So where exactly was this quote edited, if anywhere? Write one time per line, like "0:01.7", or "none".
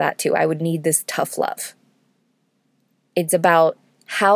0:03.0